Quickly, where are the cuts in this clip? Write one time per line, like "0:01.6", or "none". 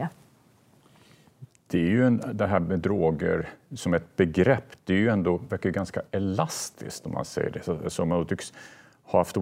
none